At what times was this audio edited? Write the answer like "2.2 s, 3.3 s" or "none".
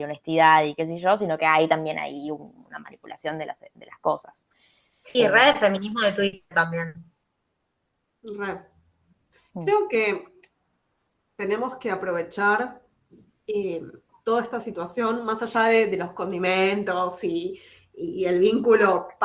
none